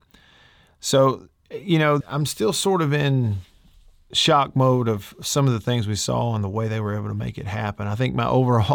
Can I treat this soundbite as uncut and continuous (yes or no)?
no